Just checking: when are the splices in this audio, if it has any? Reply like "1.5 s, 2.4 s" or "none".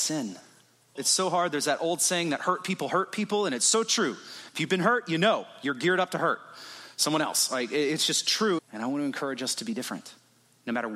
1.0 s, 8.6 s